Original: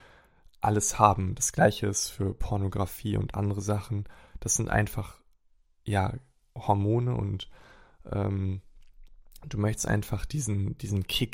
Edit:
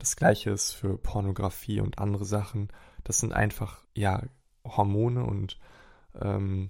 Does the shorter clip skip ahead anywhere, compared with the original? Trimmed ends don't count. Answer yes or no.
yes